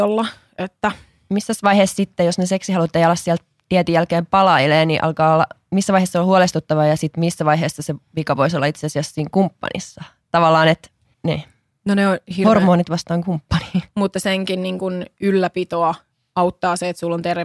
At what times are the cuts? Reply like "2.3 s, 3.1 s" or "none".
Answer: 13.9 s